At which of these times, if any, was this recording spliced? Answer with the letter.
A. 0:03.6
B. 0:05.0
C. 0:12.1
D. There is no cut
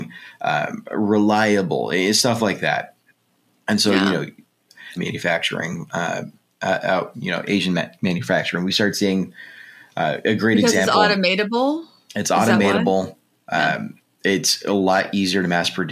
B